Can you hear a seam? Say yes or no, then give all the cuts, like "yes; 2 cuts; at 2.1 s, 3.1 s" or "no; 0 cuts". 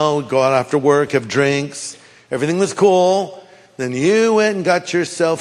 no; 0 cuts